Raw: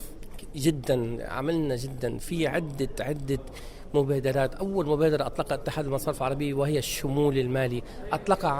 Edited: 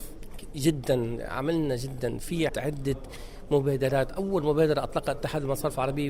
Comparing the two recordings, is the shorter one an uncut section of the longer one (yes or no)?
no